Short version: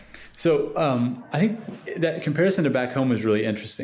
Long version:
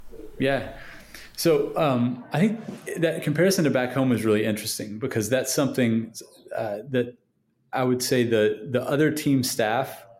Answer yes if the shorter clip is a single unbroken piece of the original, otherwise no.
yes